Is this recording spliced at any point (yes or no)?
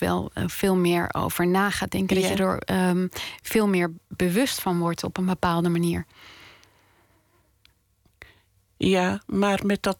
no